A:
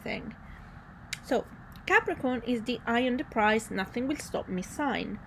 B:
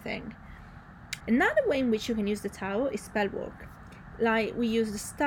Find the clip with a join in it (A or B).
B